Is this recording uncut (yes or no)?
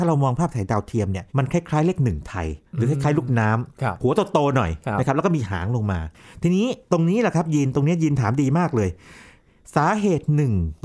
no